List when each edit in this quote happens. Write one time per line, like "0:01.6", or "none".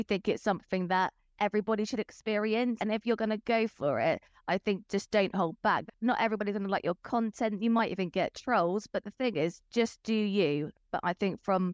0:02.8
0:05.9